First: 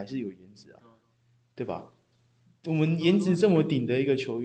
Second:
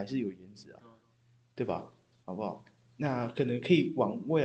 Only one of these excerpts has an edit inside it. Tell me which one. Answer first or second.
second